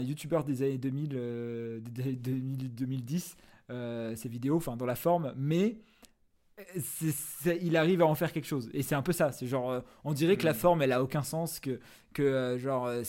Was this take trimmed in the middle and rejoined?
no; 0 cuts

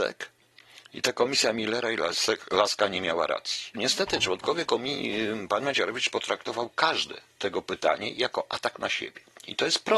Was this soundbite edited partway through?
yes; 1 cut; at 3.7 s

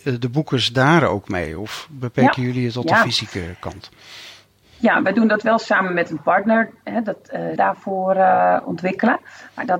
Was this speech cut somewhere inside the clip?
yes; 1 cut; at 7.6 s

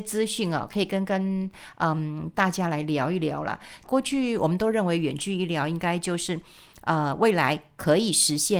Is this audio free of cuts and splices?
no; 1 cut; at 3.8 s

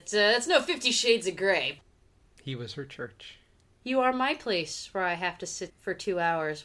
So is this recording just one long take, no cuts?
no; 2 cuts; at 3.7 s, 5.7 s

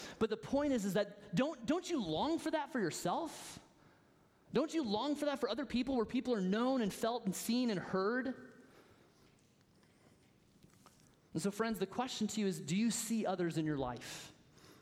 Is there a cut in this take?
no; 0 cuts

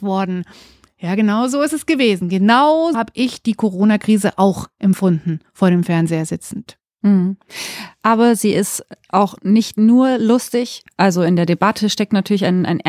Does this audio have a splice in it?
yes; 1 cut; at 2.9 s

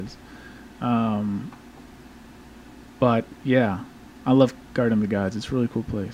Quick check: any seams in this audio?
no; 0 cuts

